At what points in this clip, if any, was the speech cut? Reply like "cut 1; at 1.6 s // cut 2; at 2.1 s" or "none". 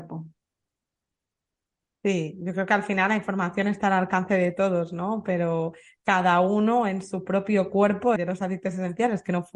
cut 1; at 8.2 s